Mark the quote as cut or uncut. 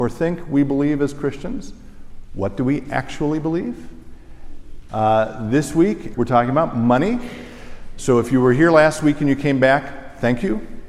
cut